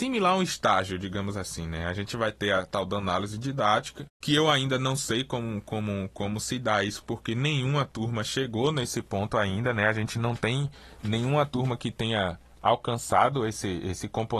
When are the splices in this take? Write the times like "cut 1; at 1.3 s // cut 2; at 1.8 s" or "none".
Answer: none